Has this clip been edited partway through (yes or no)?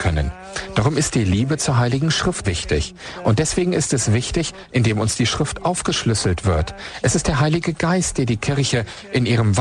yes